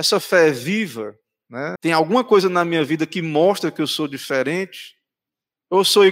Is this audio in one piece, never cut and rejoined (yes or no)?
no